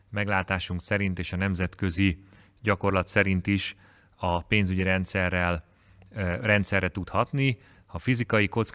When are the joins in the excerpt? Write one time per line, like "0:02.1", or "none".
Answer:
0:07.8